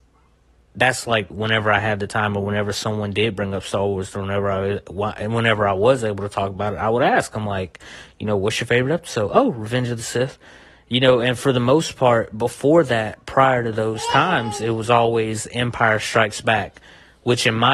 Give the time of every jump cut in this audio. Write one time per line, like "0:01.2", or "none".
0:01.3